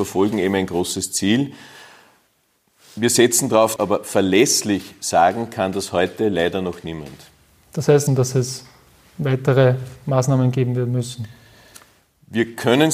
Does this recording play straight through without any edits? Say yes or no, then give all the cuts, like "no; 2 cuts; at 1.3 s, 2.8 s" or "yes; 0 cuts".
no; 2 cuts; at 3.8 s, 8.1 s